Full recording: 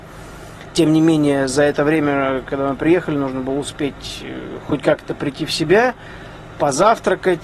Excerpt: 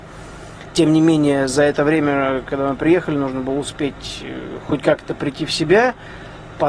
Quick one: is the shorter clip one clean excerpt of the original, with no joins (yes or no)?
yes